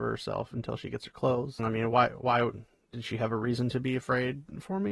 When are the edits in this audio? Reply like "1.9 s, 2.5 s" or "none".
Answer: 1.6 s

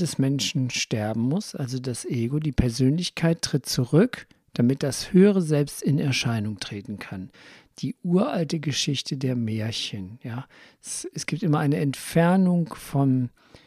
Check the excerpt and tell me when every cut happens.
none

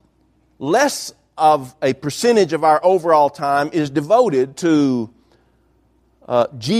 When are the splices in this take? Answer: none

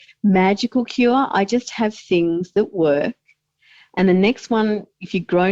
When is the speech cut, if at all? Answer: none

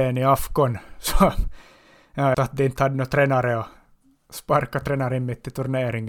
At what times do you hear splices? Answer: 2.3 s

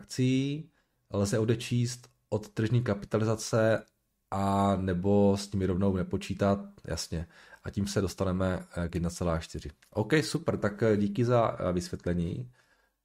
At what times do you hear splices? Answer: none

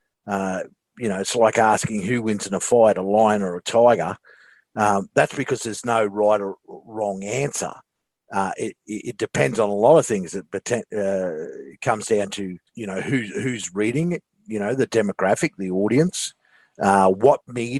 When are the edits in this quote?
12.7 s

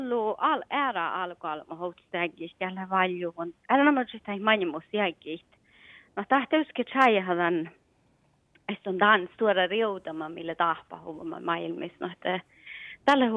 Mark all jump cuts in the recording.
none

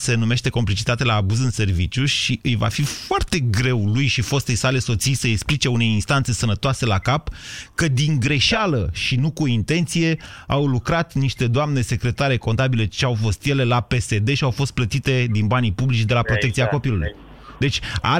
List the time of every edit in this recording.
none

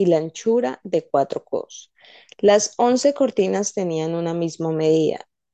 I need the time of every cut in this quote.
none

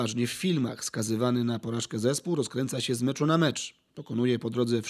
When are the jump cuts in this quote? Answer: none

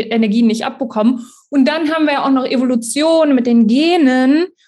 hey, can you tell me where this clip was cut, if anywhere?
none

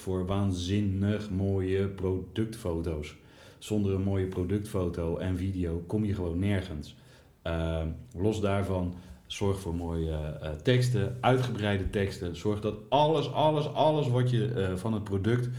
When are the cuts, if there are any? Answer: none

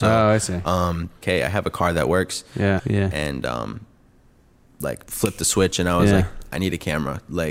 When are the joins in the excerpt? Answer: 1.2 s, 2.8 s, 5.1 s

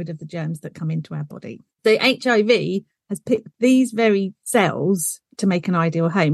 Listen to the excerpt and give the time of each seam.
none

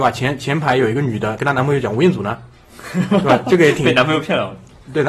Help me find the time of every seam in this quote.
1.4 s

